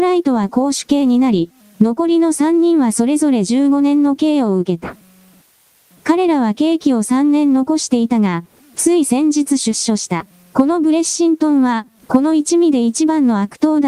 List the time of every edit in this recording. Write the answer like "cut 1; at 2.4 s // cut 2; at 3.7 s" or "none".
cut 1; at 10.5 s // cut 2; at 12.0 s